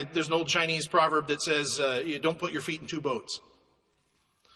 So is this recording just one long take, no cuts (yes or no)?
yes